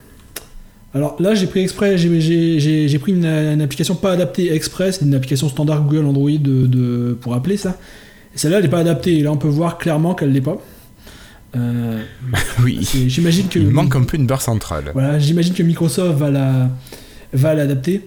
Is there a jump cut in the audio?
no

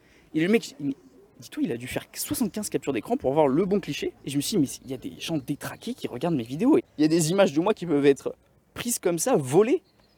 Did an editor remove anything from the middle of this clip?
yes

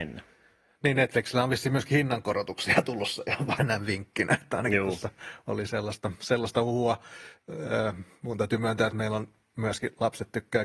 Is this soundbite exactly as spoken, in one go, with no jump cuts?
yes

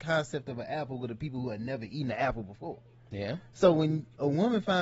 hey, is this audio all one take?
yes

